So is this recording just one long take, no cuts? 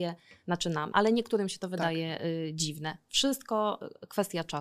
no; 1 cut; at 0.9 s

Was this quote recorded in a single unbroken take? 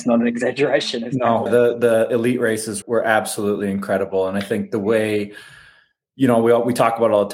no; 2 cuts; at 1.5 s, 2.8 s

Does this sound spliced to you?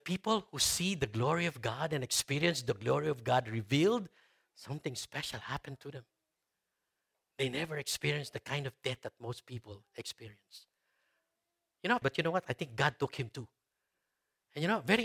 yes; 1 cut; at 12.0 s

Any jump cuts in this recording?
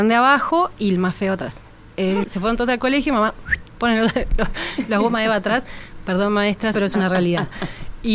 yes; 2 cuts; at 2.2 s, 6.7 s

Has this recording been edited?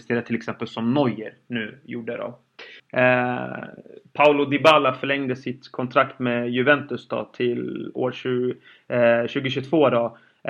yes; 1 cut; at 2.8 s

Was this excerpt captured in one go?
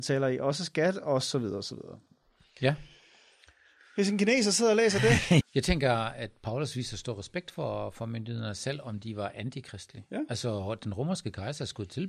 no; 1 cut; at 5.4 s

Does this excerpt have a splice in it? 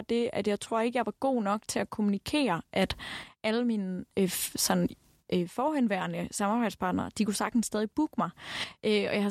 no; 0 cuts

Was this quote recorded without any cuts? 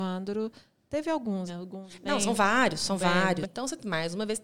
no; 2 cuts; at 1.5 s, 3.4 s

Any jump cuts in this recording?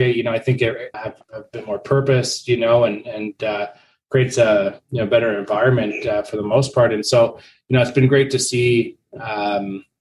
yes; 1 cut; at 0.9 s

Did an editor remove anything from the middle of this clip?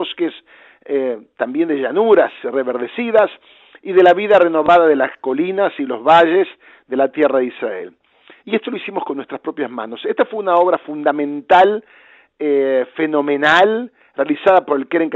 yes; 1 cut; at 5.2 s

